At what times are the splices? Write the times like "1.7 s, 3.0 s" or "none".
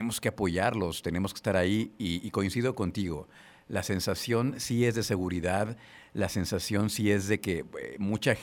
none